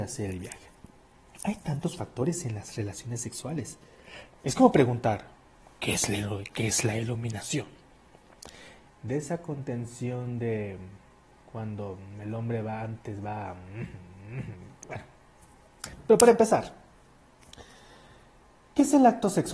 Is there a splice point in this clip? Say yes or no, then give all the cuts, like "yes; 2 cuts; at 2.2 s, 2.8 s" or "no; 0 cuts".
yes; 2 cuts; at 4.3 s, 8.9 s